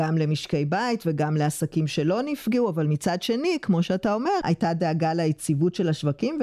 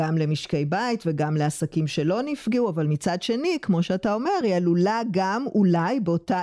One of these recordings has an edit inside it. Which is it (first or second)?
first